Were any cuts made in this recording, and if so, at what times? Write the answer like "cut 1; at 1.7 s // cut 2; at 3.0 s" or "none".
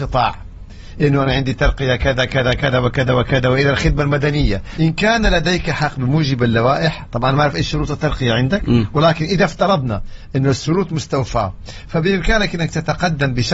cut 1; at 4.8 s